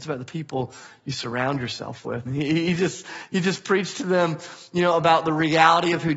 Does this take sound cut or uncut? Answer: cut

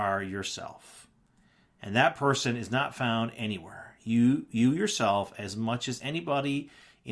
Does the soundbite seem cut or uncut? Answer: uncut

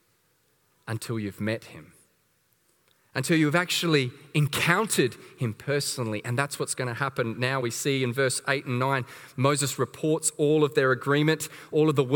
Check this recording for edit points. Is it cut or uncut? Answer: uncut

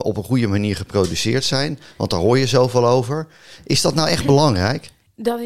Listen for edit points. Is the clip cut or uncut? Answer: uncut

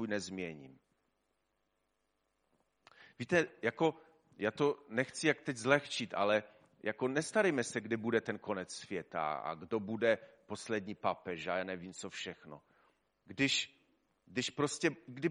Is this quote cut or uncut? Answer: uncut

